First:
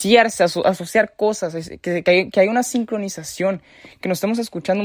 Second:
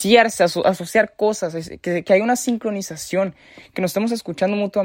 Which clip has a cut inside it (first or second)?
second